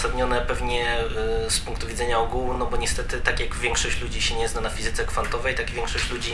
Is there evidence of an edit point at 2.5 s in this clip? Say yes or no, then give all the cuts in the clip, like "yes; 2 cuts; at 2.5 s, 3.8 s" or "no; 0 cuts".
no; 0 cuts